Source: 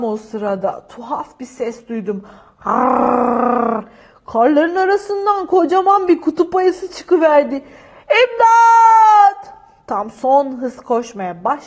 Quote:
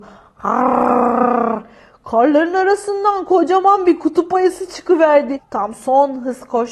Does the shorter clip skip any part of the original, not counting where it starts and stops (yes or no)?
yes